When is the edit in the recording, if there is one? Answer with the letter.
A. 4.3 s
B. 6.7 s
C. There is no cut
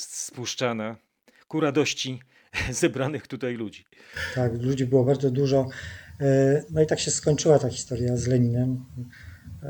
B